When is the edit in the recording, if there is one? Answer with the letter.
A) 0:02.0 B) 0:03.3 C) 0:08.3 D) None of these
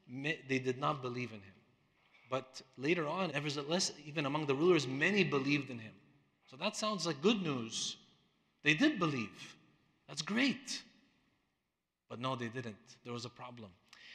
B